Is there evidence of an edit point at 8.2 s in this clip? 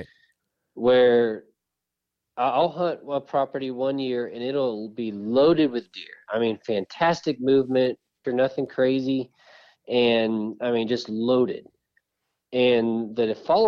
yes; 1 cut; at 8.2 s

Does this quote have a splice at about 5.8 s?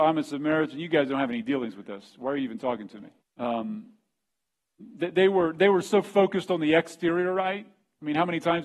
no; 1 cut; at 3.2 s

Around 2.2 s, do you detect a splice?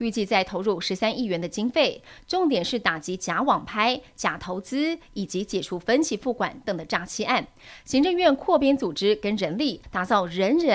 no; 2 cuts; at 6.6 s, 9.8 s

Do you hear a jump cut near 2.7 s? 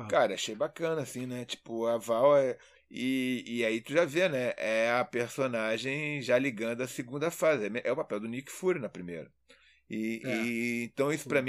yes; 1 cut; at 2.7 s

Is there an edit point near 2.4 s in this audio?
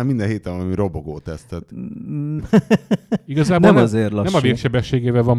yes; 1 cut; at 2.4 s

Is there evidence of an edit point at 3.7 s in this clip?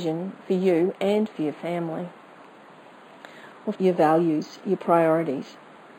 yes; 1 cut; at 3.7 s

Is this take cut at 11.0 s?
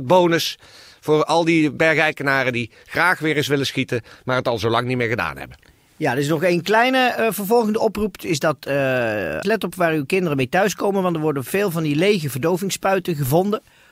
no; 1 cut; at 9.4 s

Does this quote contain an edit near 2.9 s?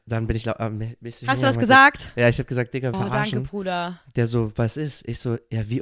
yes; 1 cut; at 2.9 s

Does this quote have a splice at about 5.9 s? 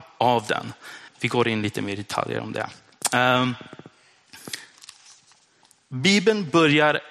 no; 1 cut; at 1.1 s

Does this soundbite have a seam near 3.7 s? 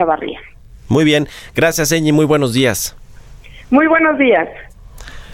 no; 0 cuts

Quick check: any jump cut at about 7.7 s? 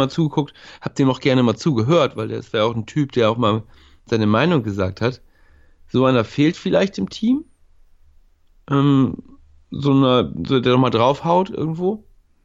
no; 0 cuts

